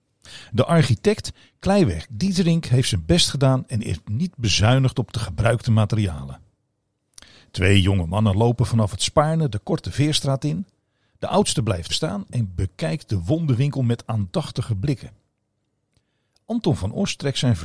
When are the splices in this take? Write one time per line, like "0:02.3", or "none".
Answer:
0:11.9